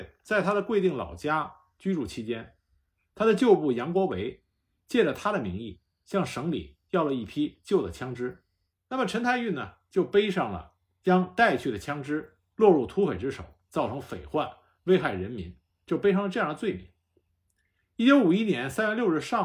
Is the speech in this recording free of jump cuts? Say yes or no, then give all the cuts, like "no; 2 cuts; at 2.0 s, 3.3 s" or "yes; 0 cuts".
no; 1 cut; at 8.7 s